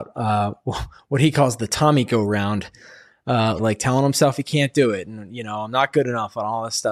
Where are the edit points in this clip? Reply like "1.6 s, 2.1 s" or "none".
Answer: 3.6 s